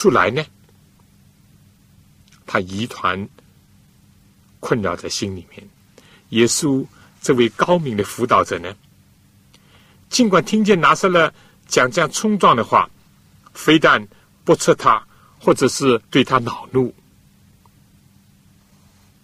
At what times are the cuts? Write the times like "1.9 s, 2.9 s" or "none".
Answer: 14.3 s, 16.0 s

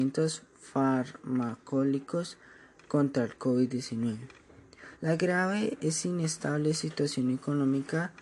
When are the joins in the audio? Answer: 4.9 s

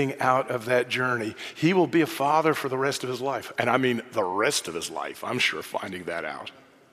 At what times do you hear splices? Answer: none

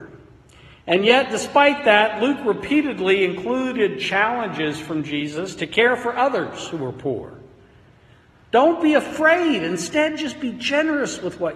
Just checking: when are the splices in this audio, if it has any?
none

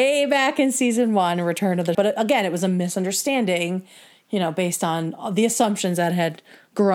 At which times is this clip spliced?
1.9 s

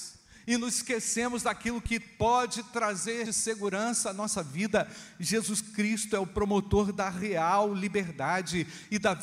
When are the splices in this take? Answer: 3.3 s

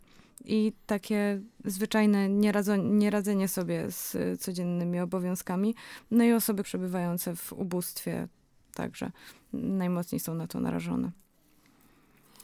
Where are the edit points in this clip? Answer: 6.6 s

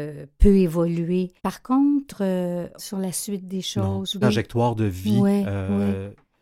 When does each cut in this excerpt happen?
1.4 s, 2.8 s, 4.2 s

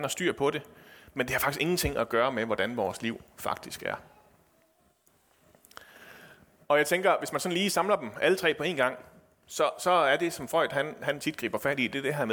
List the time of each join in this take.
none

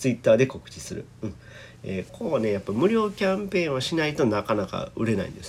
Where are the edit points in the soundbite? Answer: 2.1 s

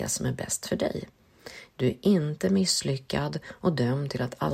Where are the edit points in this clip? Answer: 1.7 s

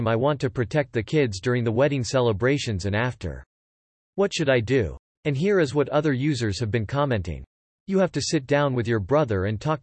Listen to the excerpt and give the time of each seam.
none

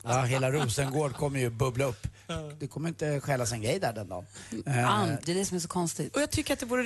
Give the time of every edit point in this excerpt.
5.2 s

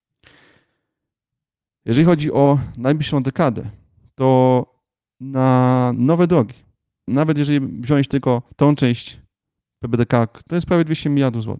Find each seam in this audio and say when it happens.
7.1 s, 8.5 s, 10.5 s

